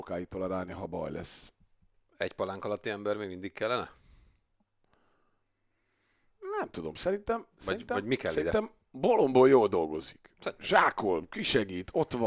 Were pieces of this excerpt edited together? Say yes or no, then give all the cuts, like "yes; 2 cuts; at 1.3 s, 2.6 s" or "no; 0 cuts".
no; 0 cuts